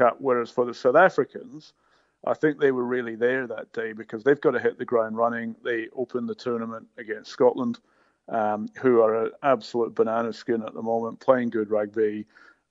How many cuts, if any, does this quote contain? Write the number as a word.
zero